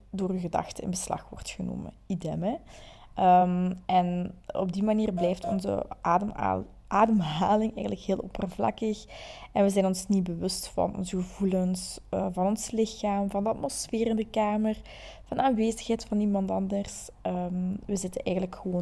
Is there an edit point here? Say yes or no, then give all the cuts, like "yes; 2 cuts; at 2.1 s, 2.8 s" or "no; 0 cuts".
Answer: no; 0 cuts